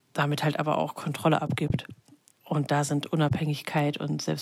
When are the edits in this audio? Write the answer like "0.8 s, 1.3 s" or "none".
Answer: 2.3 s